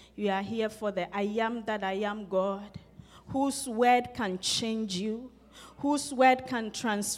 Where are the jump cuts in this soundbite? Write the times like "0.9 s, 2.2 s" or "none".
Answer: none